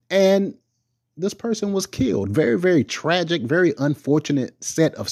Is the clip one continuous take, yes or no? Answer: yes